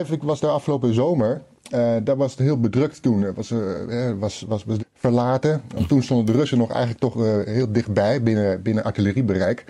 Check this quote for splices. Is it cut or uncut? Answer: cut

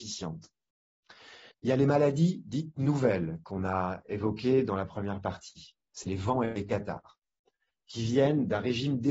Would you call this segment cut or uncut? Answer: cut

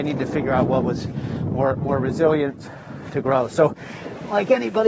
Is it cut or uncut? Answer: uncut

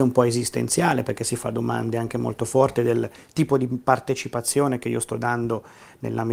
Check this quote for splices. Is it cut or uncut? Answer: uncut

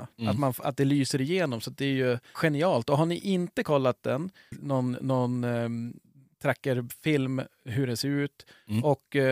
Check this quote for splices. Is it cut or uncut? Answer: cut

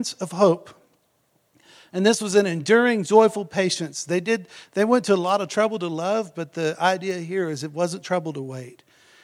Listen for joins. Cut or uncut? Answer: uncut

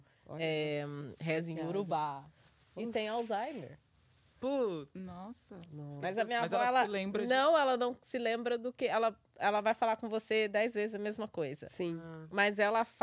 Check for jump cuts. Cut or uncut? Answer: uncut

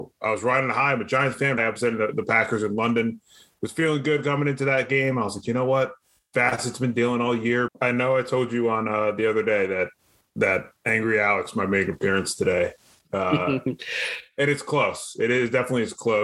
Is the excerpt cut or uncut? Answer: cut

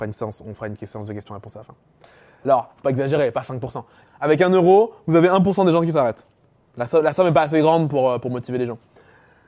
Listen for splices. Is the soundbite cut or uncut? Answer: cut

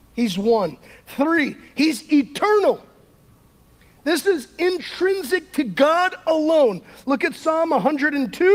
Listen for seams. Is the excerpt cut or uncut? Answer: uncut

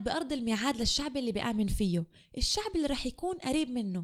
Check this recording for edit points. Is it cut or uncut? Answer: uncut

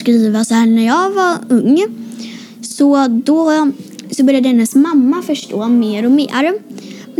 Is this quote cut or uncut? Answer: uncut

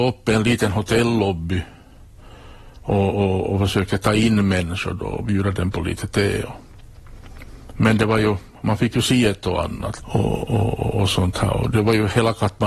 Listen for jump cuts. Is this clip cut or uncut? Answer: cut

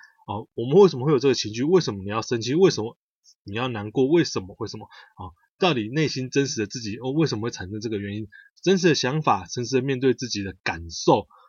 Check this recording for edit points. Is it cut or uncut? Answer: uncut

